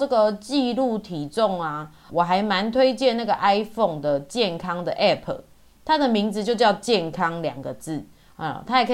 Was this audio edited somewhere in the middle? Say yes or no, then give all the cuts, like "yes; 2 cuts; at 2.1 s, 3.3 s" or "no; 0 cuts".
yes; 1 cut; at 2.1 s